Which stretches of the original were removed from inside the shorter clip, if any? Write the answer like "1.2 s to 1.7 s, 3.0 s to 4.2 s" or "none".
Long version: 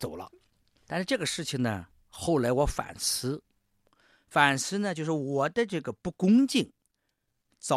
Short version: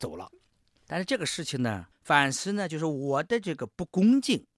1.9 s to 4.2 s